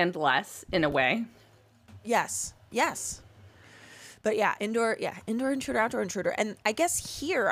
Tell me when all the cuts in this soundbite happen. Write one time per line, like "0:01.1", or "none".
none